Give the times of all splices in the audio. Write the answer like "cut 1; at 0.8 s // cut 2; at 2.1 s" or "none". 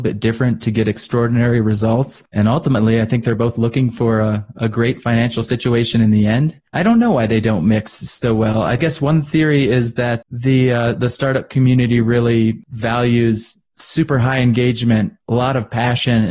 none